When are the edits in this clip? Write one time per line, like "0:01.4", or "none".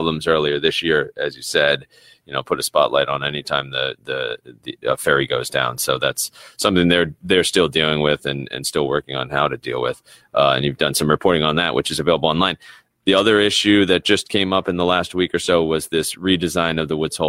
none